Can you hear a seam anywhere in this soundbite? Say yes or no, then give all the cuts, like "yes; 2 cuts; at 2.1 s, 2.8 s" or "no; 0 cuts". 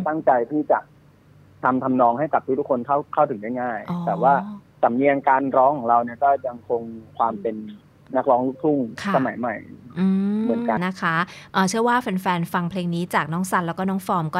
yes; 1 cut; at 10.8 s